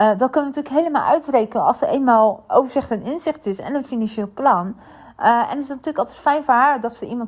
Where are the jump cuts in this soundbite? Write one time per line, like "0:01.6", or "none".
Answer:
none